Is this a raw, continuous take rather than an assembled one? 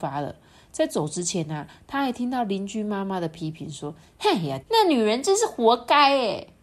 no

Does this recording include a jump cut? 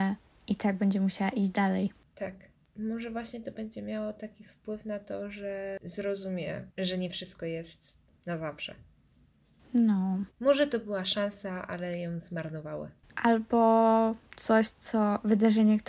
yes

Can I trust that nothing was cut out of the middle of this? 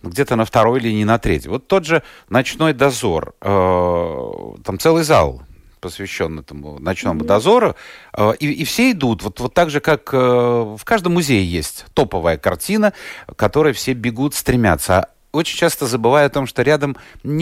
yes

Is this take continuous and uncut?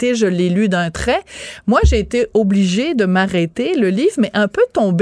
yes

